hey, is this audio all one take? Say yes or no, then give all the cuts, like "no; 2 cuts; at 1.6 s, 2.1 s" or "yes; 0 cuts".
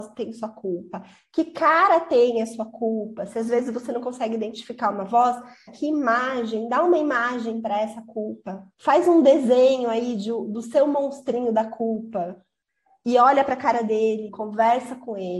no; 2 cuts; at 5.7 s, 14.3 s